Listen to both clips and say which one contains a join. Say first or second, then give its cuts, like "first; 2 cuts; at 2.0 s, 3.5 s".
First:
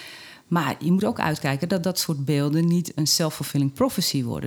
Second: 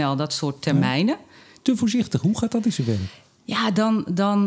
second; 1 cut; at 1.6 s